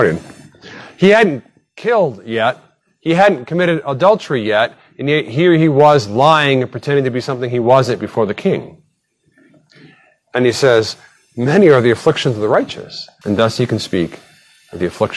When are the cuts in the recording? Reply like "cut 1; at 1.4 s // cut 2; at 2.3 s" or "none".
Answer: cut 1; at 13.2 s

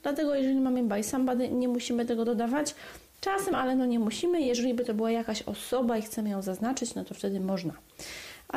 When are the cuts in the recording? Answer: none

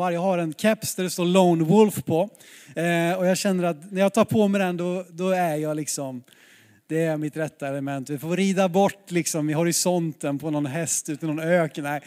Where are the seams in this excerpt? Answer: none

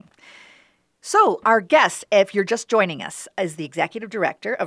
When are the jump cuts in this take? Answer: none

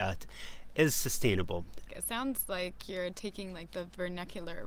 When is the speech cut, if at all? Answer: cut 1; at 1.9 s

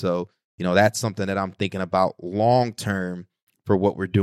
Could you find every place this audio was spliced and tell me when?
none

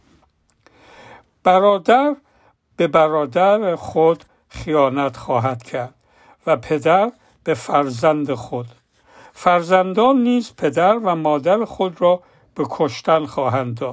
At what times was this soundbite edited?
none

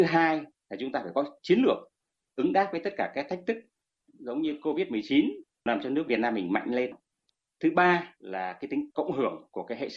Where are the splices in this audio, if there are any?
none

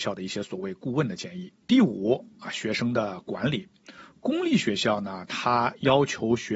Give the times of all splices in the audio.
cut 1; at 1.6 s

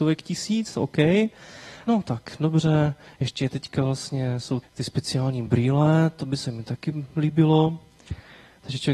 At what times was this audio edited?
cut 1; at 1.9 s // cut 2; at 4.6 s

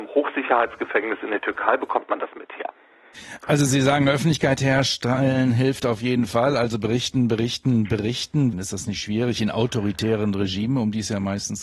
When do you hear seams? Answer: cut 1; at 8.5 s

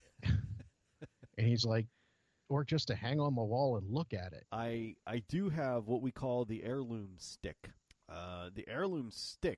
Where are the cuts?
cut 1; at 4.4 s // cut 2; at 7.9 s

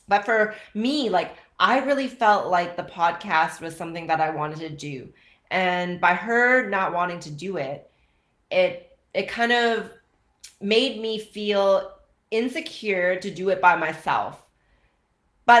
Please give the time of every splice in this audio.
none

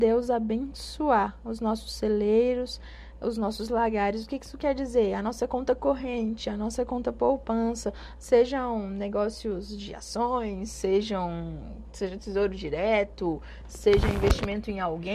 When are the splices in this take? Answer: cut 1; at 8.2 s

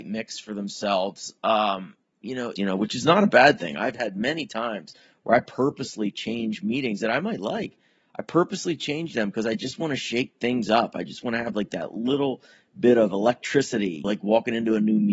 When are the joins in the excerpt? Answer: cut 1; at 2.6 s // cut 2; at 14.0 s

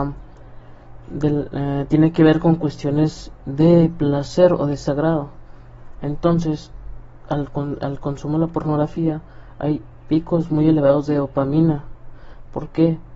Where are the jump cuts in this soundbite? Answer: none

